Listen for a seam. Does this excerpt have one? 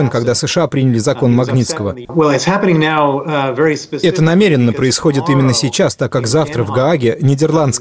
yes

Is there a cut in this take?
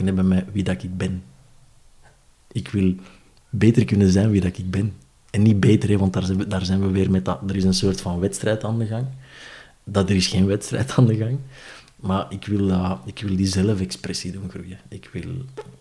no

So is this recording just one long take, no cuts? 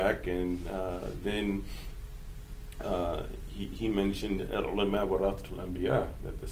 yes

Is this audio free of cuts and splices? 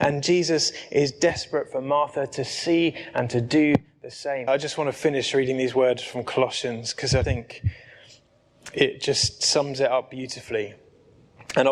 no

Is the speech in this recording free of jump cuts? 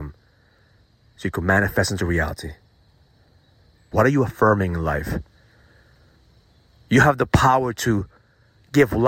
no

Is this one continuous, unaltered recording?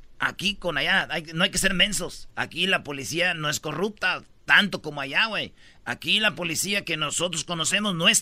no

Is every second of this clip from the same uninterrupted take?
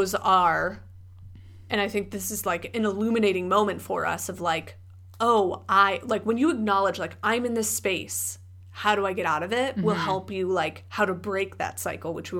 yes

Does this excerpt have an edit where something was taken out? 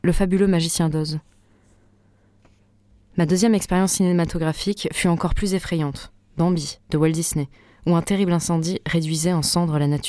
no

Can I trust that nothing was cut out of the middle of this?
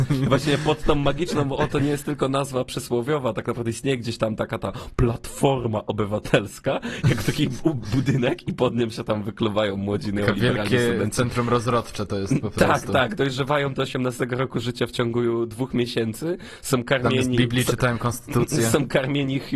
yes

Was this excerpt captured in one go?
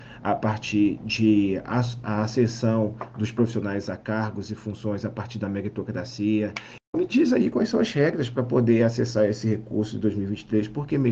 no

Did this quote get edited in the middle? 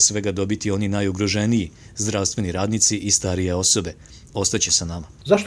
yes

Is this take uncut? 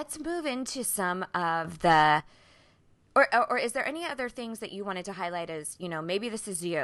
yes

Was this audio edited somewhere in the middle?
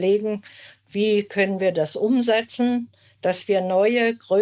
no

